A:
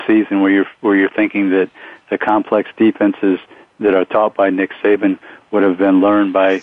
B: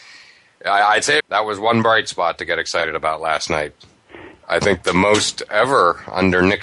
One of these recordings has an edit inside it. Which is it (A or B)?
B